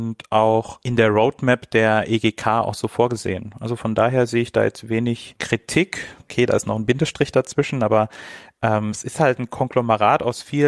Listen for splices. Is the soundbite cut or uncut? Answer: cut